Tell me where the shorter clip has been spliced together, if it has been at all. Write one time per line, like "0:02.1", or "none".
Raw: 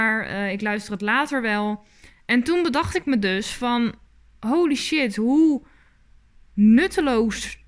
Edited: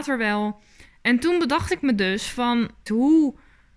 0:02.9